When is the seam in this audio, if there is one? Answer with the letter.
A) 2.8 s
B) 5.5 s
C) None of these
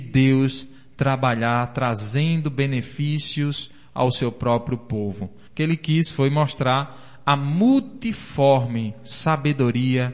B